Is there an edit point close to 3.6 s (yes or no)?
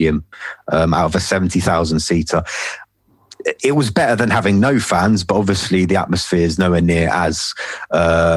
no